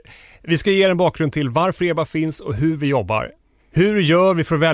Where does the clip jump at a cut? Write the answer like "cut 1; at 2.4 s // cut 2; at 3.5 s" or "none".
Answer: cut 1; at 3.6 s

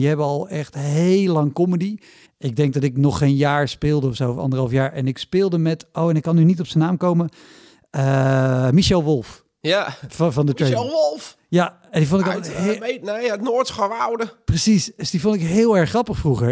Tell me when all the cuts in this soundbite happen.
cut 1; at 2.2 s

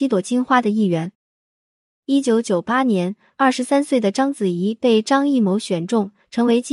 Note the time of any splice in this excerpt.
none

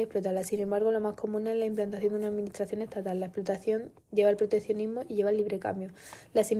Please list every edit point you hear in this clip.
none

